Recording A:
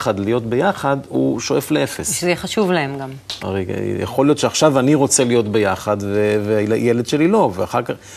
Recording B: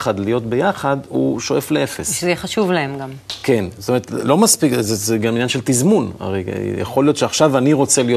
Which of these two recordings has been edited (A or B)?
A